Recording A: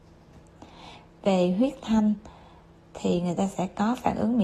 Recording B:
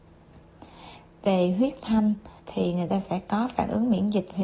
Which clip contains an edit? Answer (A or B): B